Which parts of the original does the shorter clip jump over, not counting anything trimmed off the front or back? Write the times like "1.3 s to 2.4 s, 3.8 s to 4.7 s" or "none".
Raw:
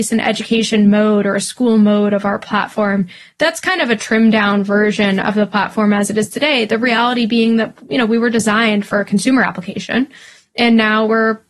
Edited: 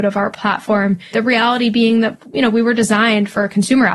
3.2 s to 6.7 s